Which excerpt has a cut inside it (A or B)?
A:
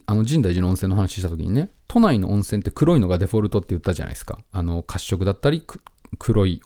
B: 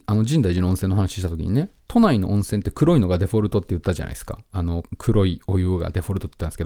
B